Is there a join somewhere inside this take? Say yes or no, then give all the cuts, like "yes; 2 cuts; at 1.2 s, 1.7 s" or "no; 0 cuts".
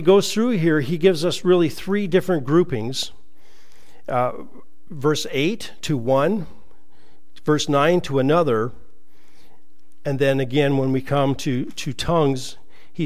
no; 0 cuts